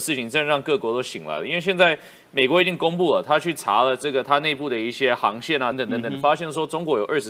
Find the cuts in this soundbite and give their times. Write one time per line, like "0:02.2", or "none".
0:05.7